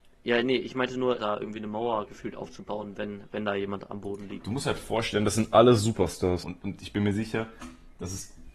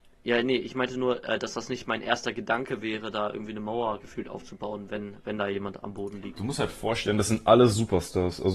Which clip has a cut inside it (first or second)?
first